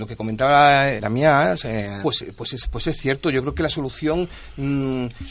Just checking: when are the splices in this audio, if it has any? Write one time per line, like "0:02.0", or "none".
0:01.0
0:02.0